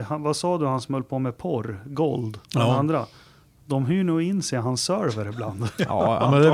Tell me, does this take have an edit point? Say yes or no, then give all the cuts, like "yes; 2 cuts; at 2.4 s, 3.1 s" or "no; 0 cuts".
yes; 1 cut; at 2.4 s